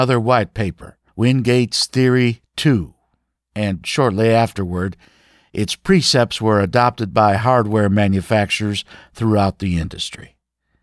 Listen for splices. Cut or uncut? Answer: uncut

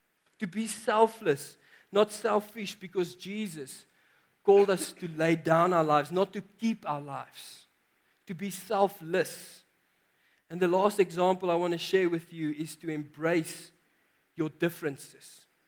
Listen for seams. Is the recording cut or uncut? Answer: uncut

